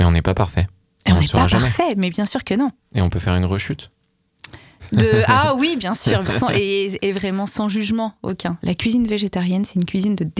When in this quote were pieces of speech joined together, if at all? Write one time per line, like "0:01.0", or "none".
0:06.2
0:08.6